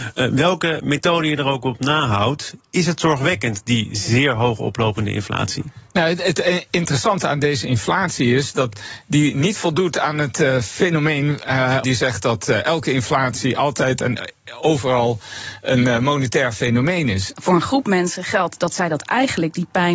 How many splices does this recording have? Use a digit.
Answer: 2